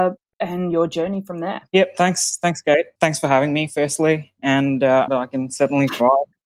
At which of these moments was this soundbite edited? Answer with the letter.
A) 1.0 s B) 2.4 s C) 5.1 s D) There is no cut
C